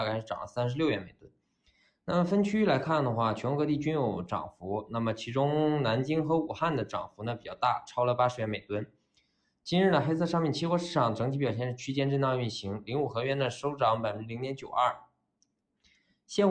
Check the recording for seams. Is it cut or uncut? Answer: uncut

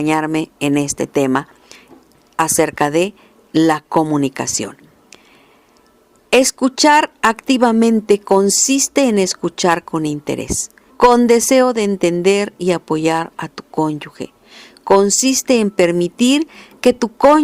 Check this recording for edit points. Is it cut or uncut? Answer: cut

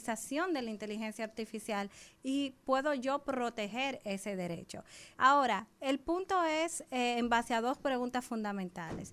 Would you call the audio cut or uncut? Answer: cut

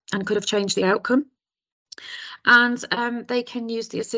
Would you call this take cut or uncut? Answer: uncut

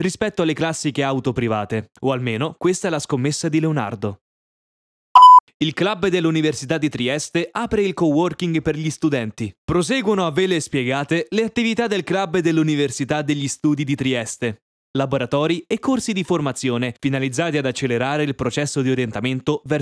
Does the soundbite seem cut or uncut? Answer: cut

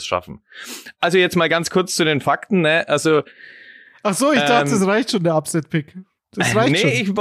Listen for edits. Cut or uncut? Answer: uncut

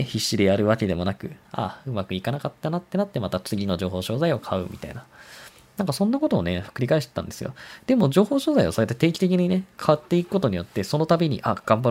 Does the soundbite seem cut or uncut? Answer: cut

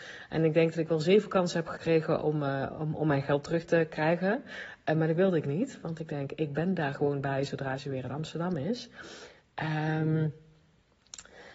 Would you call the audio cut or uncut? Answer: uncut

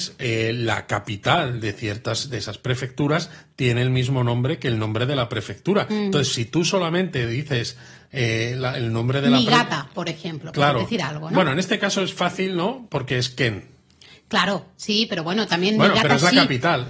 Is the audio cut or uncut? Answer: uncut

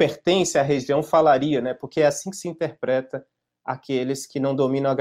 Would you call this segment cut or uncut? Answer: uncut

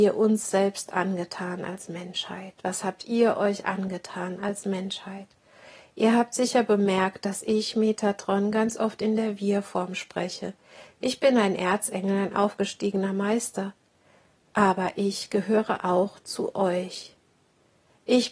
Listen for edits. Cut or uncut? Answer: uncut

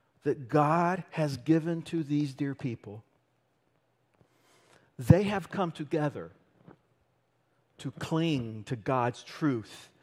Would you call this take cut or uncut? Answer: uncut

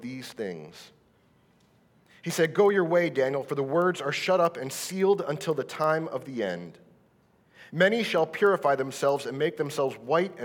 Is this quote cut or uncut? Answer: uncut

